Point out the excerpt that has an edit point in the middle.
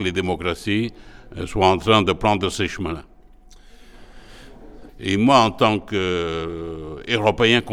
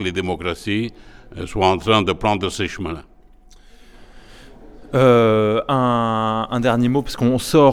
first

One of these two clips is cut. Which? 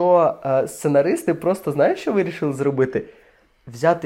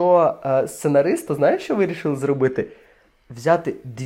second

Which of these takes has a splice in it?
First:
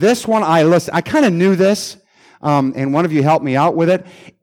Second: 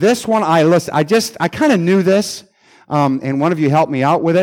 first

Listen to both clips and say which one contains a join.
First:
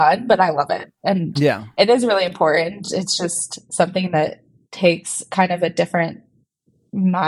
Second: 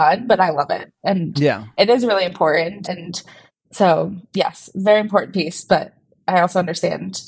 second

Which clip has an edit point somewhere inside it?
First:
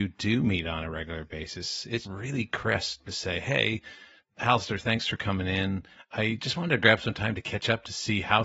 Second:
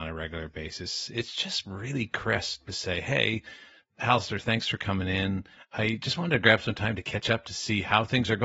first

